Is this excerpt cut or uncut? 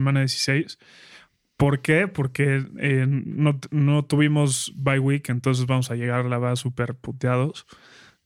uncut